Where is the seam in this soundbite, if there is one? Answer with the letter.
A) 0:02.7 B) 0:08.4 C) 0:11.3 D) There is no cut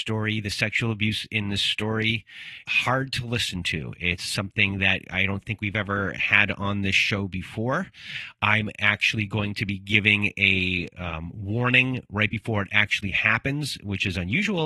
A